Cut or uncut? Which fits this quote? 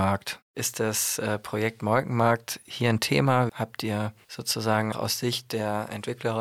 cut